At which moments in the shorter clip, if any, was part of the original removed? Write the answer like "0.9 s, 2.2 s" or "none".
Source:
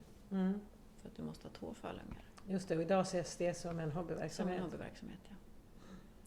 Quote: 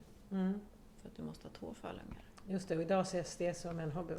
none